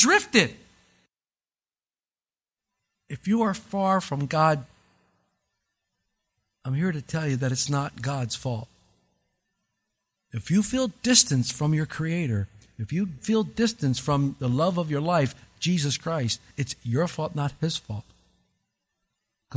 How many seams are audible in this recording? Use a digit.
1